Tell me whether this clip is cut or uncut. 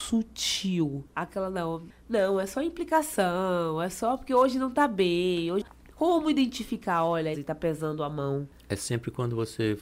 cut